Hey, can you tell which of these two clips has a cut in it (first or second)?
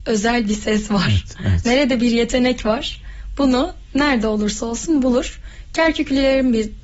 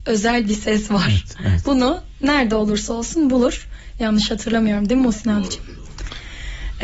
second